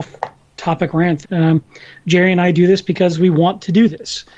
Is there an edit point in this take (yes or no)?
yes